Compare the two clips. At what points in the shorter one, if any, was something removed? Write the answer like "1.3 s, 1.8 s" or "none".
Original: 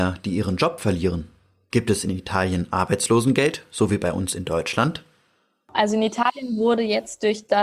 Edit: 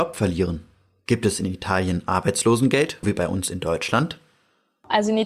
3.0 s